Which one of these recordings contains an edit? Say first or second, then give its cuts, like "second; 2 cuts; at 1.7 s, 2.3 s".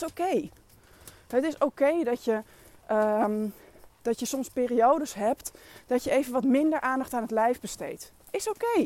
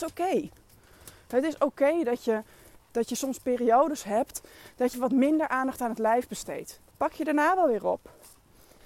second; 3 cuts; at 2.8 s, 4.9 s, 6.9 s